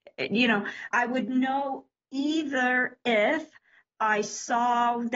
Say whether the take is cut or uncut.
cut